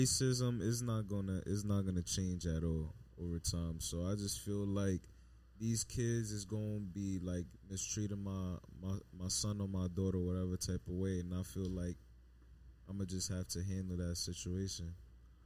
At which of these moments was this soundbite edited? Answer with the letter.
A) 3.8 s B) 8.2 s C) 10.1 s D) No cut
D